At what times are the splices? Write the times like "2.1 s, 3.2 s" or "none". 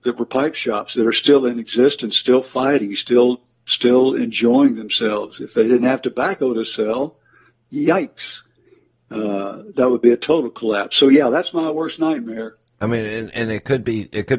12.8 s